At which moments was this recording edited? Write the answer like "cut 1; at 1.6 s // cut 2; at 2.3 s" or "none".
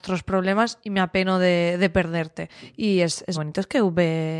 cut 1; at 3.3 s

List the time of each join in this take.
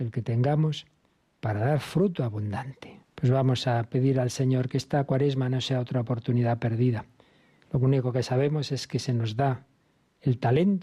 cut 1; at 3.0 s // cut 2; at 7.6 s

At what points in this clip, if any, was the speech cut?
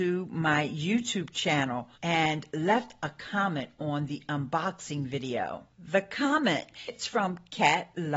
cut 1; at 1.9 s

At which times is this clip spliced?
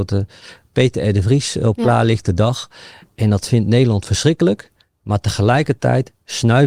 none

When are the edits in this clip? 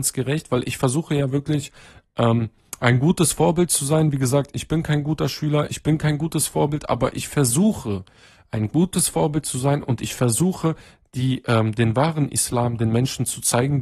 none

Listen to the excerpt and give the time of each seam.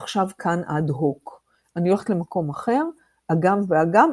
none

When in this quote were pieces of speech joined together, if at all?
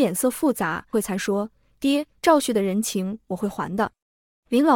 cut 1; at 0.9 s // cut 2; at 2.2 s

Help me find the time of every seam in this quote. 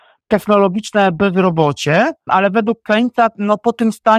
cut 1; at 2.3 s

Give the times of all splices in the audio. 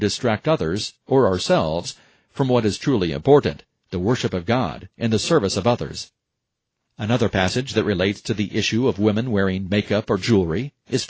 none

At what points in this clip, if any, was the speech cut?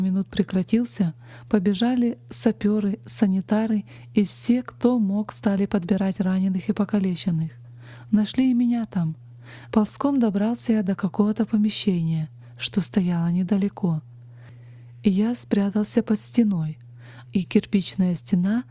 cut 1; at 9.7 s // cut 2; at 17.2 s

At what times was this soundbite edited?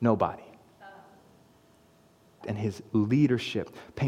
cut 1; at 2.4 s

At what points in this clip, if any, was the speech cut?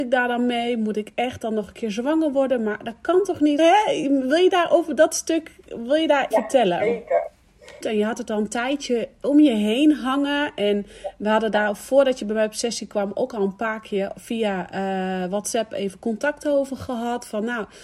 cut 1; at 3.6 s // cut 2; at 6.3 s // cut 3; at 7.8 s

